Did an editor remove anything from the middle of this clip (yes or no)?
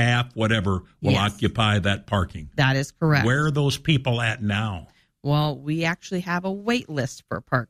no